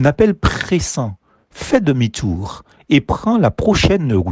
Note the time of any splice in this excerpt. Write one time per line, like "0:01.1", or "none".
none